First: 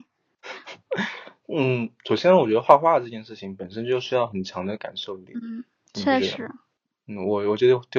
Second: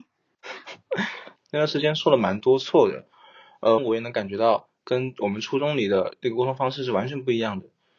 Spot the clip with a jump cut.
second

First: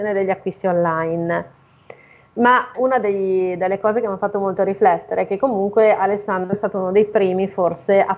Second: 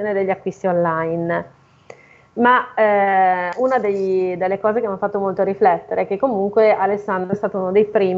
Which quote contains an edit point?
first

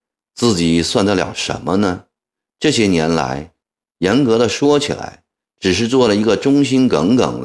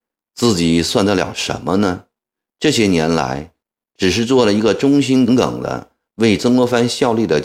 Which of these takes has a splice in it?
second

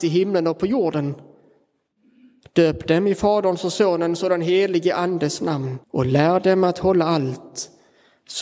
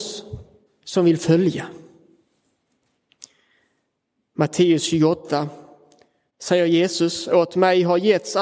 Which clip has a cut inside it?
first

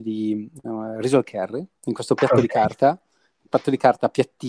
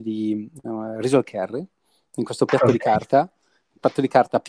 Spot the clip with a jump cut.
first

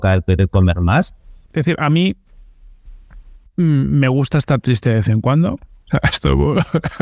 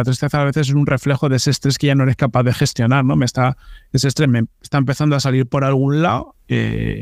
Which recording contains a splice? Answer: first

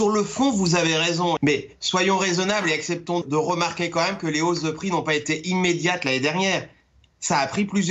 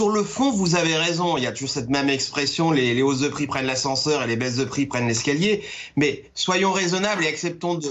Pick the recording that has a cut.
first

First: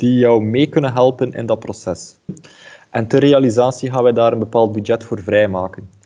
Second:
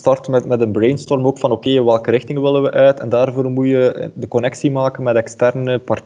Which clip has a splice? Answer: first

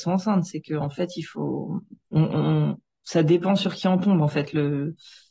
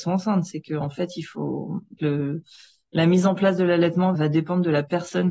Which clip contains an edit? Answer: second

